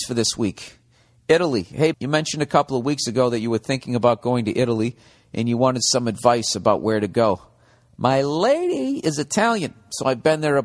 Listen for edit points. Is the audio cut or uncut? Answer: cut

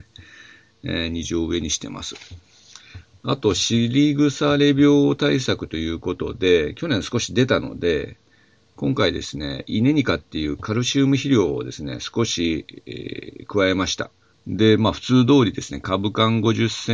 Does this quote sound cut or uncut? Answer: cut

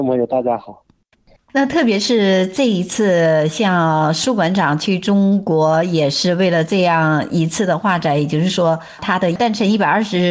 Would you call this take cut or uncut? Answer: uncut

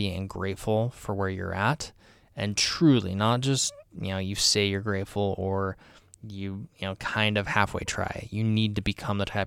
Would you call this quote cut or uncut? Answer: uncut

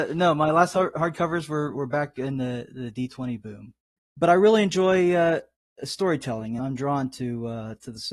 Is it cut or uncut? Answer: cut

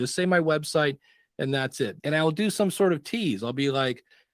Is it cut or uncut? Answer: cut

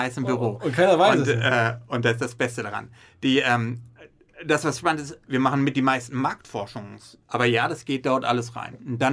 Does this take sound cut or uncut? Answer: cut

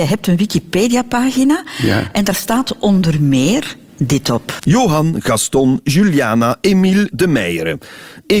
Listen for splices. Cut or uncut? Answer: cut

